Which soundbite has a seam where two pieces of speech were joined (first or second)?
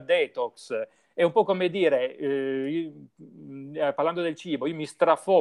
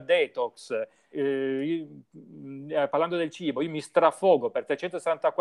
second